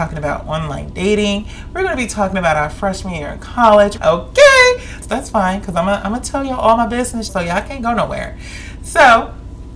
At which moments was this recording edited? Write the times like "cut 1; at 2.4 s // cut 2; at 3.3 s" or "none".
cut 1; at 4.0 s // cut 2; at 5.0 s // cut 3; at 7.3 s